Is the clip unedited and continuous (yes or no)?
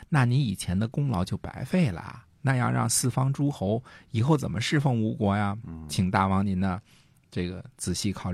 yes